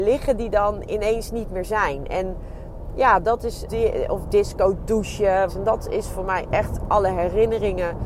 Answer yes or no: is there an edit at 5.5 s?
yes